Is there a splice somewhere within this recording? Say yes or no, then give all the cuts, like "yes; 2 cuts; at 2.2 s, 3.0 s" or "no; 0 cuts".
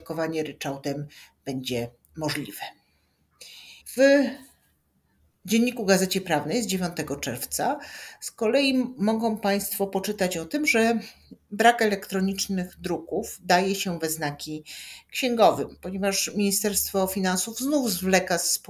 yes; 1 cut; at 3.8 s